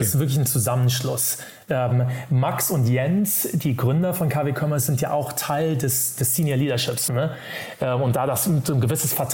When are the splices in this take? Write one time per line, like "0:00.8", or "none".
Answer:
0:07.1